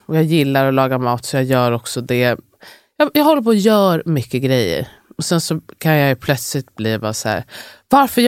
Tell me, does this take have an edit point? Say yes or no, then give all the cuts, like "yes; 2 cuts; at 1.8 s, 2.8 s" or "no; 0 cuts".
no; 0 cuts